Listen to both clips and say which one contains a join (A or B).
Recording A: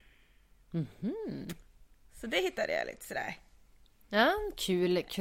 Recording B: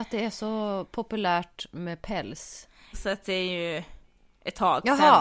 B